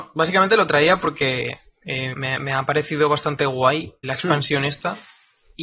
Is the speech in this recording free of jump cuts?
no; 2 cuts; at 2.1 s, 4.0 s

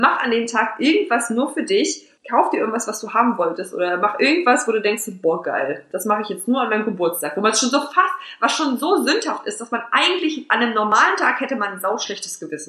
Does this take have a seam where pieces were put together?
no; 0 cuts

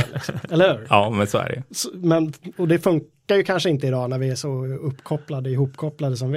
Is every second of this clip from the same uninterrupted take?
yes; 0 cuts

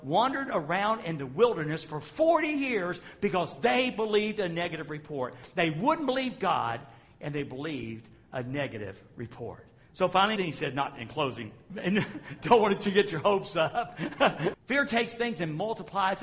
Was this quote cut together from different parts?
yes; 3 cuts; at 10.4 s, 11.7 s, 14.5 s

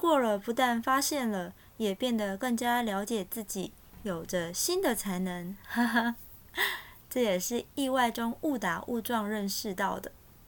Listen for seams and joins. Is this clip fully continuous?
yes; 0 cuts

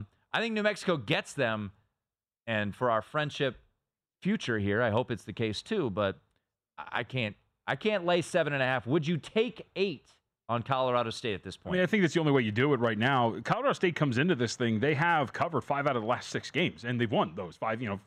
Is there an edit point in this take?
no; 0 cuts

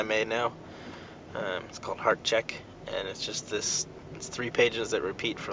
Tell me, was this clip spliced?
no; 0 cuts

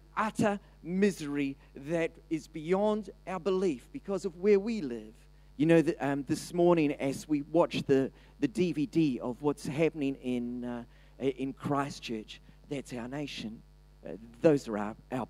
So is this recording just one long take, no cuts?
no; 1 cut; at 5.5 s

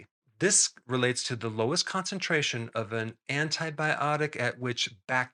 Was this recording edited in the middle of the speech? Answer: no; 0 cuts

